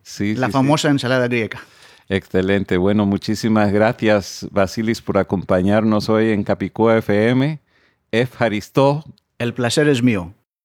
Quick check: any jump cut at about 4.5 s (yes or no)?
no